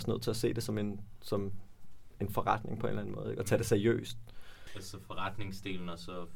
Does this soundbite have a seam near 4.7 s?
yes; 1 cut; at 4.7 s

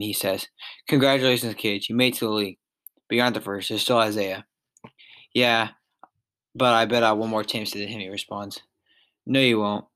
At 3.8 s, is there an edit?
no; 0 cuts

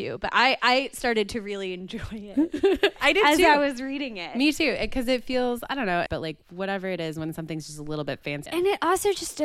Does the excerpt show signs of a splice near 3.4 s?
no; 2 cuts; at 6.1 s, 8.5 s

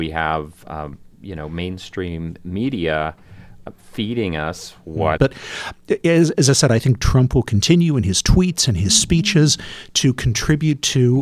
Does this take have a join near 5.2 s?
yes; 1 cut; at 5.2 s

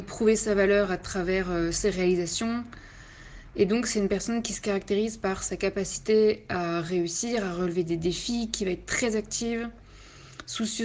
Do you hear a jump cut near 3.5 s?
no; 0 cuts

